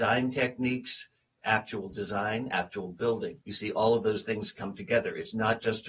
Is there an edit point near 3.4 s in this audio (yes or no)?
yes